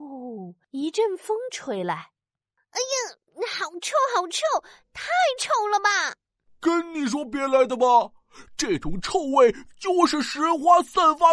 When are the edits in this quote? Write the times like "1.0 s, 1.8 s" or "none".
6.5 s